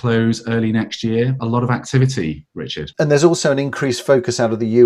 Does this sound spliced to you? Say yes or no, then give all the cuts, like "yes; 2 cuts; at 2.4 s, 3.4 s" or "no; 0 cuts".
yes; 2 cuts; at 1.4 s, 2.9 s